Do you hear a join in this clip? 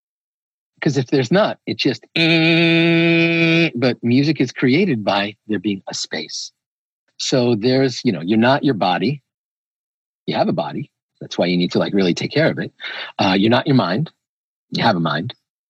no; 0 cuts

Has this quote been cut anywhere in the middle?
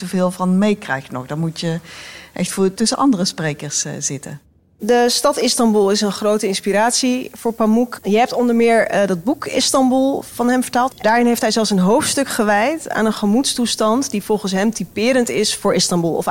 yes; 2 cuts; at 8.0 s, 10.9 s

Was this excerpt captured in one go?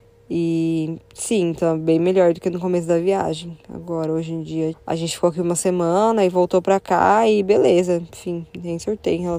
no; 1 cut; at 4.7 s

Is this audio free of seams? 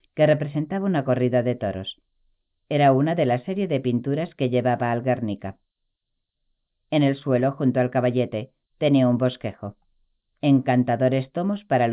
no; 1 cut; at 10.3 s

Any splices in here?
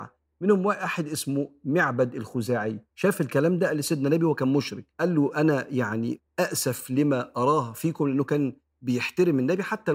yes; 2 cuts; at 2.9 s, 4.9 s

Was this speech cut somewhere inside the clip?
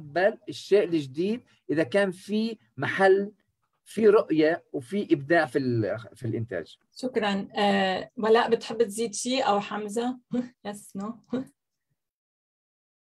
yes; 2 cuts; at 6.8 s, 10.5 s

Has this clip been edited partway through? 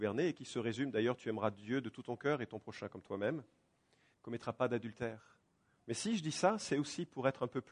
yes; 2 cuts; at 4.1 s, 5.8 s

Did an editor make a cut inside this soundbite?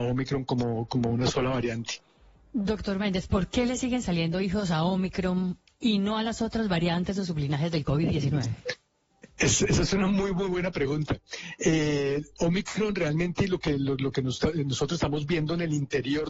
no; 0 cuts

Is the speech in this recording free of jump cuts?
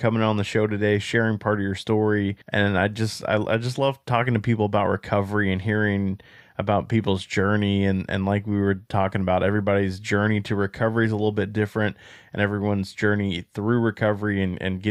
no; 1 cut; at 2.4 s

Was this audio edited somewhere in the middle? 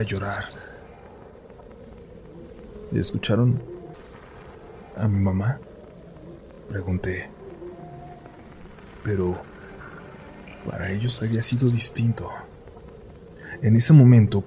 no; 0 cuts

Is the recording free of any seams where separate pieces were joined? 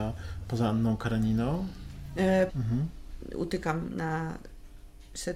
no; 1 cut; at 2.5 s

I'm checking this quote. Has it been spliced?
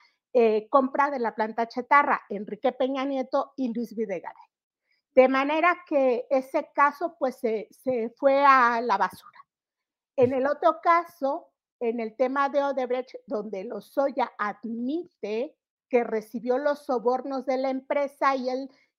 no; 0 cuts

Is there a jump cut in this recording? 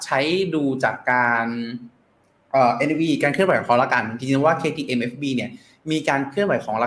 no; 0 cuts

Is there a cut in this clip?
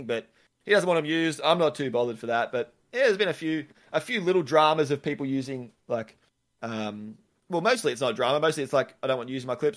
no; 0 cuts

